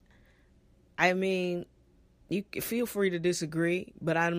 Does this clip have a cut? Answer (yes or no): no